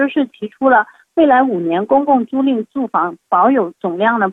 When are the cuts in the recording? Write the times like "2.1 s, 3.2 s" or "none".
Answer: none